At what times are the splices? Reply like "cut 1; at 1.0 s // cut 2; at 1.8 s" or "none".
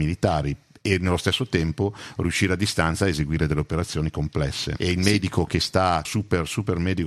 cut 1; at 4.8 s // cut 2; at 6.1 s